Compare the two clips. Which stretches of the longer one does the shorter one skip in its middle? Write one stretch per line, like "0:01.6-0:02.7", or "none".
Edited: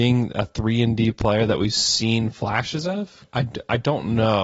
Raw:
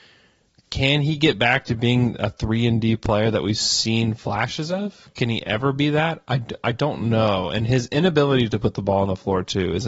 0:05.1-0:06.2